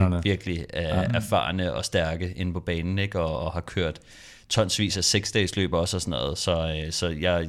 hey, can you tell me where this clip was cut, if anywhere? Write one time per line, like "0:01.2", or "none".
none